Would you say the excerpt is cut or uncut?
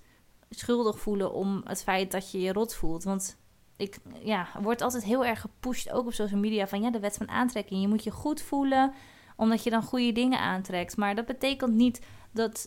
uncut